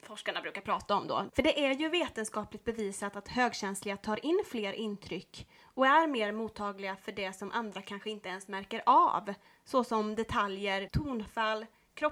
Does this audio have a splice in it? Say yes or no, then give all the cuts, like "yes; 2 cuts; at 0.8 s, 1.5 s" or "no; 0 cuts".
yes; 2 cuts; at 1.3 s, 10.9 s